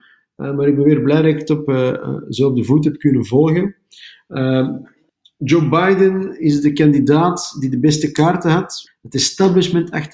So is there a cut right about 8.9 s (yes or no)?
yes